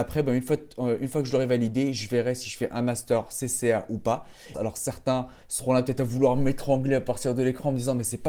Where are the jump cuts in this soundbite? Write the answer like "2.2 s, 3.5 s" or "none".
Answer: 4.5 s